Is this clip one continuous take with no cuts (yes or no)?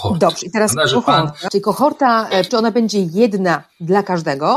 no